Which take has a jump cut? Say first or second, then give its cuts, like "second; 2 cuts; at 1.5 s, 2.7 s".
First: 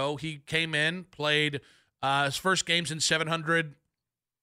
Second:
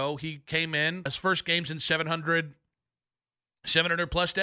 second; 1 cut; at 1.1 s